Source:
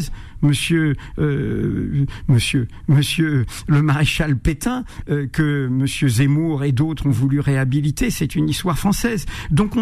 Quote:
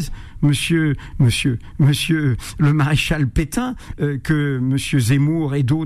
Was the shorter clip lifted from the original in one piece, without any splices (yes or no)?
no